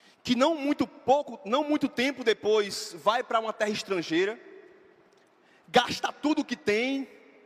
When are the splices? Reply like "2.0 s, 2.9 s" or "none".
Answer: none